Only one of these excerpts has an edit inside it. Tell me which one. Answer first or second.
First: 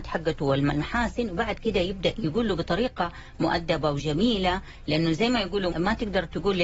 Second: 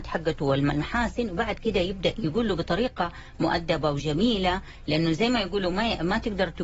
first